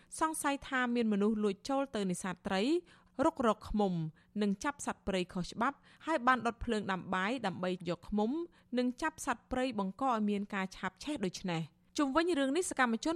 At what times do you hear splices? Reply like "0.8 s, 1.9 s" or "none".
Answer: none